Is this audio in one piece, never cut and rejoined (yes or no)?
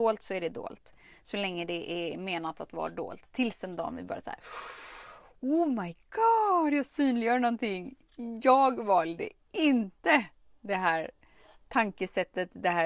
yes